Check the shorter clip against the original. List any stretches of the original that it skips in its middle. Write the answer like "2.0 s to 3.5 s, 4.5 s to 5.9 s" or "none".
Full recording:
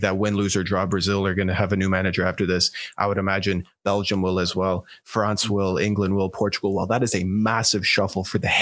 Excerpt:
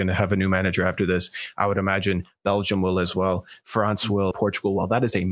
5.7 s to 6.3 s

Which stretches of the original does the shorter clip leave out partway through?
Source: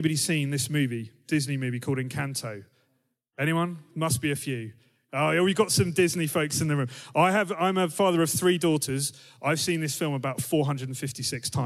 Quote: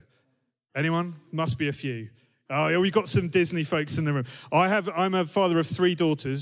none

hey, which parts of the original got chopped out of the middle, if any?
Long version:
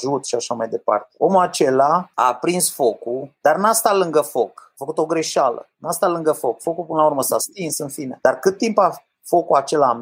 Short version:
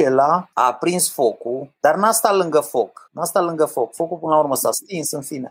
4.7 s to 5.7 s

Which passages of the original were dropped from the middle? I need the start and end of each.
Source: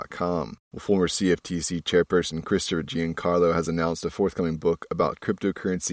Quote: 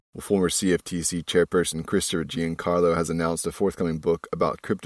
none

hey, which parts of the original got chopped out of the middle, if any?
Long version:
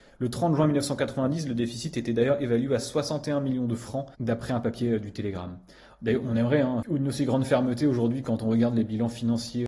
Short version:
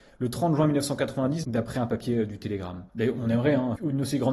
1.4 s to 4.2 s, 5.6 s to 6.0 s

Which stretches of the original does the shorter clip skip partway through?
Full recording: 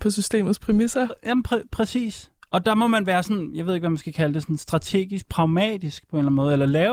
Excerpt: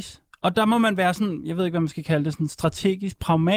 none

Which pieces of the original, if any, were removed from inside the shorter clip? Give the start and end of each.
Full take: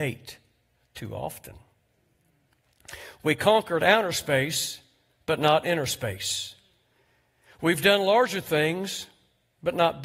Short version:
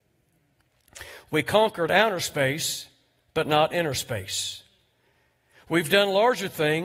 none

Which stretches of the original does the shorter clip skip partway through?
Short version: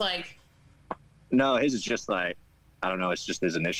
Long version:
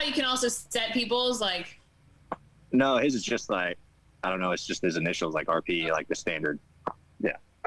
none

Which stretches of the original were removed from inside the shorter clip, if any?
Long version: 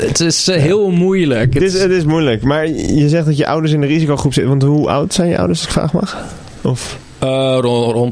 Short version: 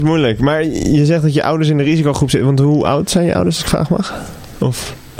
none

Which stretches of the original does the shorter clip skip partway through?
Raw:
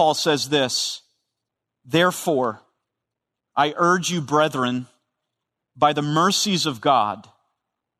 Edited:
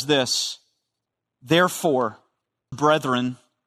3.2 s to 4.2 s

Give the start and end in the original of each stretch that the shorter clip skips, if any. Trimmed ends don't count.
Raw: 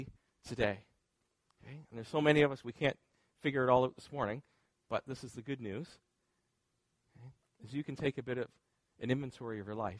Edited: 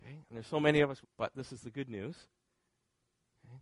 2.6 s to 4.7 s

